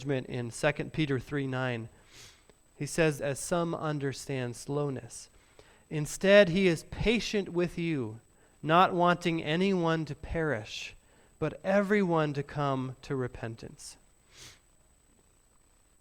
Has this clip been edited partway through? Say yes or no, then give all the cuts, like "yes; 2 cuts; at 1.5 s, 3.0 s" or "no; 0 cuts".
yes; 1 cut; at 3.2 s